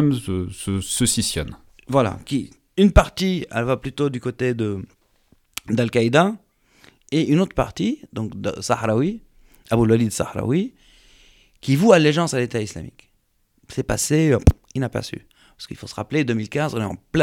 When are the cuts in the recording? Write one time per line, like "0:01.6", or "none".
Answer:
none